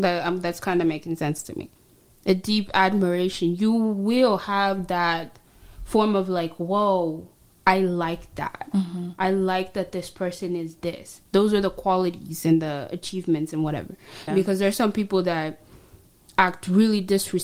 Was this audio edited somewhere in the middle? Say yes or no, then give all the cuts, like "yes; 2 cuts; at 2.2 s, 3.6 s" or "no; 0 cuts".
yes; 1 cut; at 14.3 s